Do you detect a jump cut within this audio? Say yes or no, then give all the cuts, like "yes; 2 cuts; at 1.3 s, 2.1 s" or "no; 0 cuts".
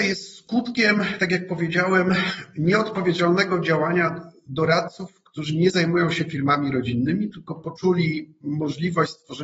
no; 0 cuts